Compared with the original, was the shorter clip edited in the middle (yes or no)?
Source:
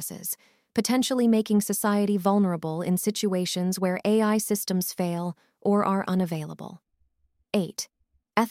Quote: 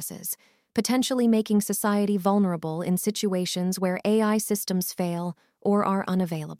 no